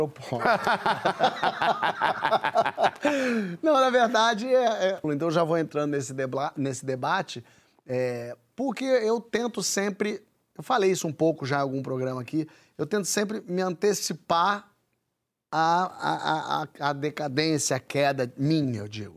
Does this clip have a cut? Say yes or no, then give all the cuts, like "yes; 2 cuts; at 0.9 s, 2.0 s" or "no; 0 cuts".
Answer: yes; 1 cut; at 5.0 s